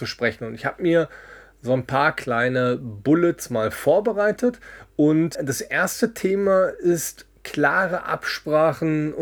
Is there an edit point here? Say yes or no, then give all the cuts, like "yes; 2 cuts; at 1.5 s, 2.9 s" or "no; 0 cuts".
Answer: yes; 1 cut; at 5.4 s